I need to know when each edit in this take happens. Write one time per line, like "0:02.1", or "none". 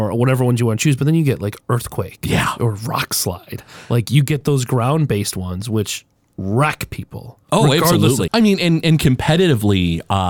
0:08.3